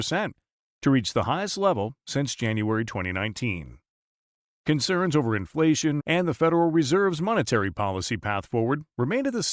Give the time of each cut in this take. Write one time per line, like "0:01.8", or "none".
0:06.0